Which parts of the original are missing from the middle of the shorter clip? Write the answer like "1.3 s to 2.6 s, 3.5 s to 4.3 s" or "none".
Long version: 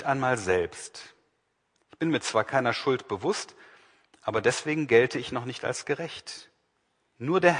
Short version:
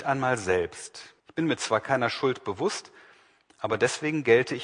1.2 s to 1.8 s